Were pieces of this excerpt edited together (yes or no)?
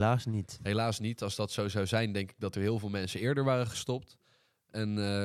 no